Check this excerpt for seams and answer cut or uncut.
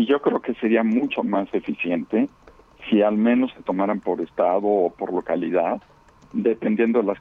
uncut